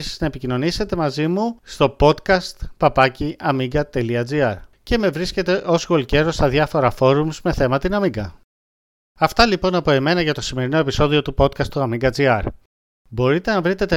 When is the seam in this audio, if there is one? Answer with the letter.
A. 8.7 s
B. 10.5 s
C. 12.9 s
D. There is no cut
C